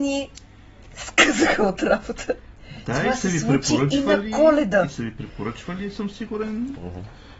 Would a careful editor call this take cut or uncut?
uncut